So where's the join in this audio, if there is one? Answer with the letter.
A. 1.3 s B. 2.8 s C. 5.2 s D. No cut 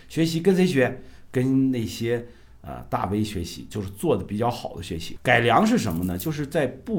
C